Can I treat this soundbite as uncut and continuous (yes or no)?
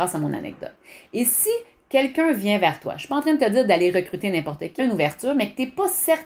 no